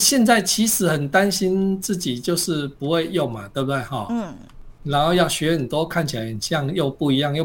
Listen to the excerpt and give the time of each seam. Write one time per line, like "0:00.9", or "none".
none